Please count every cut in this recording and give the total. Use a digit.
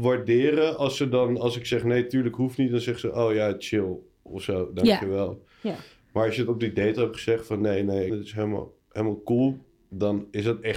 1